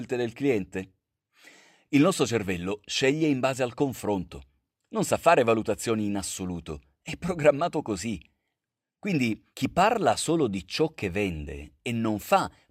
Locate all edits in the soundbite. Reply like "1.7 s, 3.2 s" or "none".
9.5 s